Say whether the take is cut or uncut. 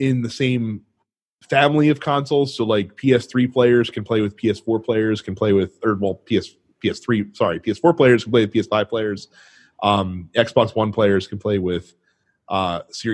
uncut